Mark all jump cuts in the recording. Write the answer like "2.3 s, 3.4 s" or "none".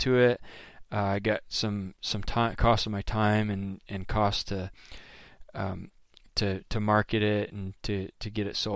none